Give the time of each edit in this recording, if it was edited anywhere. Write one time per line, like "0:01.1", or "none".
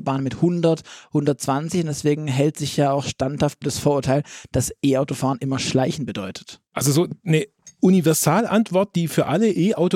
0:06.7